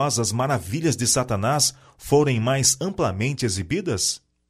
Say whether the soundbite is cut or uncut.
uncut